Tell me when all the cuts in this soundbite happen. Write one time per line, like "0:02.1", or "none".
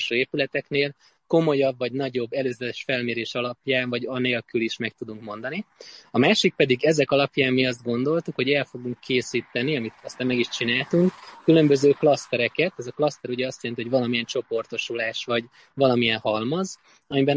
none

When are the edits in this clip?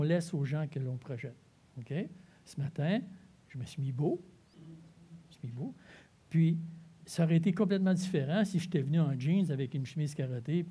0:04.5
0:07.0

